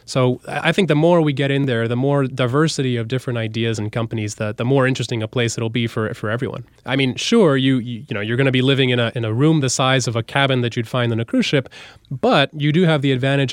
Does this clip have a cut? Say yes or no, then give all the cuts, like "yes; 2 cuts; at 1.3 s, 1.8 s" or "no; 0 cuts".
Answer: no; 0 cuts